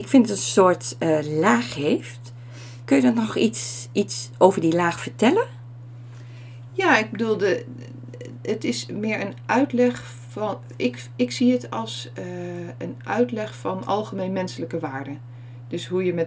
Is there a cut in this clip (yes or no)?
no